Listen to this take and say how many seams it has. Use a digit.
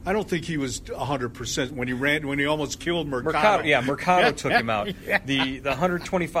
0